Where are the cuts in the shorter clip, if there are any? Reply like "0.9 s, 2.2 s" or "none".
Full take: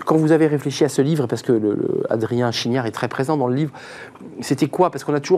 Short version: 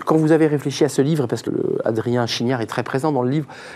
1.5 s